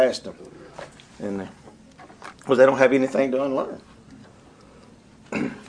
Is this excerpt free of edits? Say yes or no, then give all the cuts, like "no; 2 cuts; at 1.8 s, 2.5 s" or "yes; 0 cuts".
yes; 0 cuts